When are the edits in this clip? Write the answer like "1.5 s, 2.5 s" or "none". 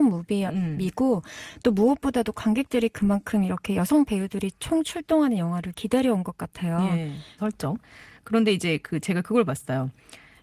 7.4 s